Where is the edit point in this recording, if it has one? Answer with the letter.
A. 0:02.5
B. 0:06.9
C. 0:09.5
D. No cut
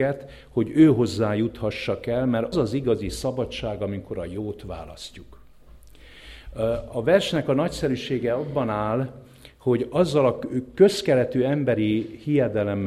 A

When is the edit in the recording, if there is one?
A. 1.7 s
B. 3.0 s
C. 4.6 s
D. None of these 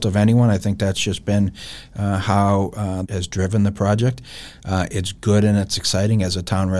B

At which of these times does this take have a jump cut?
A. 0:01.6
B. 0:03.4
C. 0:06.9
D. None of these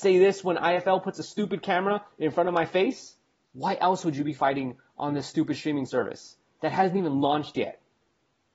B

